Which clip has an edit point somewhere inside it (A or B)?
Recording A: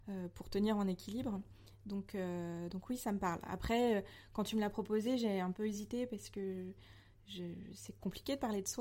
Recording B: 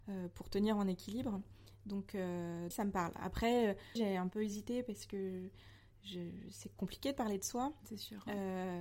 B